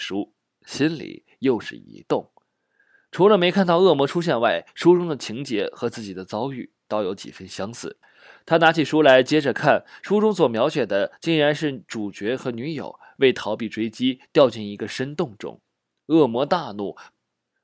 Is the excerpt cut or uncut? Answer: uncut